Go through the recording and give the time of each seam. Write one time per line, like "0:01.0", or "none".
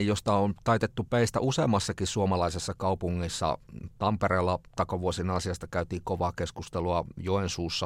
0:03.9